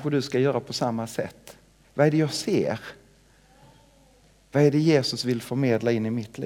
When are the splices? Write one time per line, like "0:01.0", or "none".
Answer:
0:01.8